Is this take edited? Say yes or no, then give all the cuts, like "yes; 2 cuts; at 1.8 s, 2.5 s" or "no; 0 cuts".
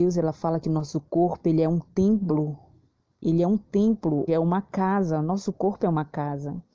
yes; 1 cut; at 4.3 s